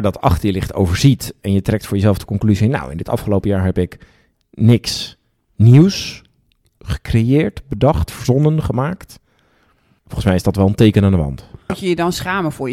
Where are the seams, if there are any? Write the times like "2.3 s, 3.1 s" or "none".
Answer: 11.7 s